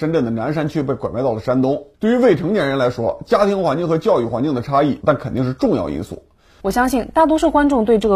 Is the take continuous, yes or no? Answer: no